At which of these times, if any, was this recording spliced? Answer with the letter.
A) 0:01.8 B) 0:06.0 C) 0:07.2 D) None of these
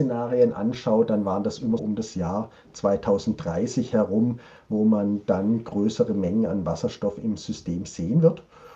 A